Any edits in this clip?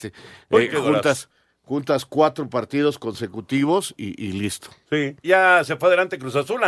yes; 2 cuts; at 4.0 s, 5.2 s

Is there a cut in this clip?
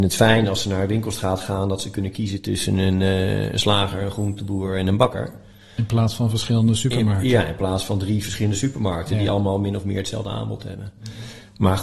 no; 0 cuts

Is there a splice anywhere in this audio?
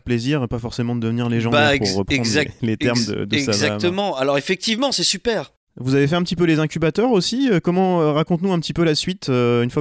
no; 0 cuts

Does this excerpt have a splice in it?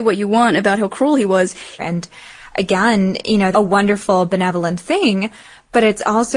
yes; 2 cuts; at 1.8 s, 3.5 s

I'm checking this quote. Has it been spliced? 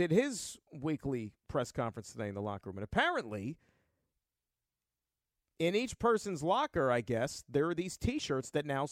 no; 0 cuts

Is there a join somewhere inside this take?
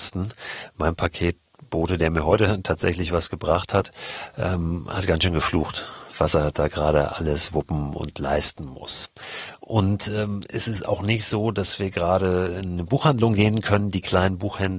no; 0 cuts

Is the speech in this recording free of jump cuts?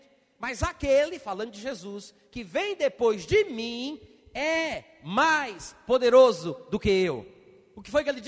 yes; 0 cuts

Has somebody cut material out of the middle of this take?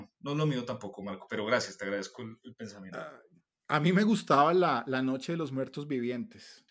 no; 0 cuts

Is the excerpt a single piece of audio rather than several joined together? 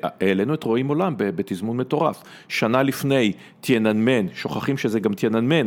yes; 0 cuts

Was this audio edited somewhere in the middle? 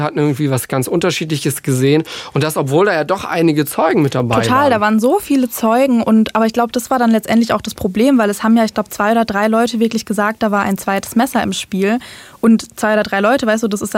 no; 0 cuts

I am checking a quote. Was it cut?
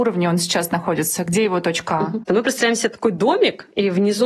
no; 0 cuts

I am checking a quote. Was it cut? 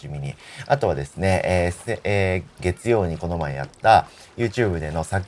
yes; 1 cut; at 2.6 s

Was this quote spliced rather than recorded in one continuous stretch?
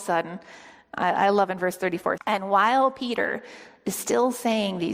yes; 1 cut; at 2.2 s

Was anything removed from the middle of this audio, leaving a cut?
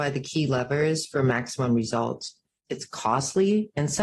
yes; 1 cut; at 2.7 s

